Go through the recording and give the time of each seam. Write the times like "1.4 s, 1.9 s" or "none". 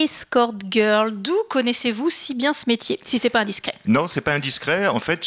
none